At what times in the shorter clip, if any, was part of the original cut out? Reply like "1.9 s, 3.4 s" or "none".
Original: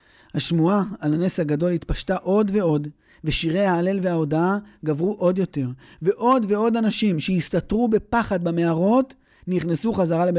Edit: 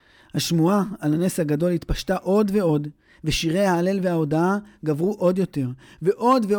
none